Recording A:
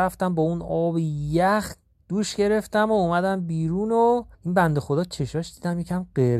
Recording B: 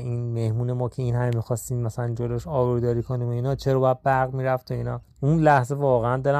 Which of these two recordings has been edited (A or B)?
A